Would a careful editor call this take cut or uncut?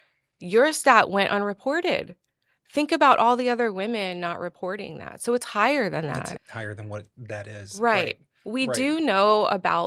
cut